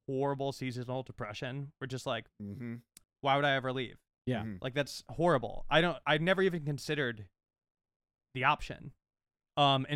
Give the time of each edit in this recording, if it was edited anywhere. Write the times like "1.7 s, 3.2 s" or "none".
3.0 s